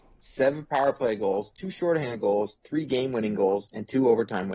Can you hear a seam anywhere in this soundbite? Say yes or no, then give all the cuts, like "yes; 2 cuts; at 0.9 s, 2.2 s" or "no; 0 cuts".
no; 0 cuts